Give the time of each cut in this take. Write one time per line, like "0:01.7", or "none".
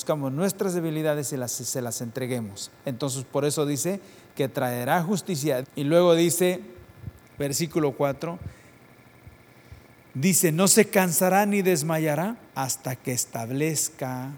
0:05.6
0:12.5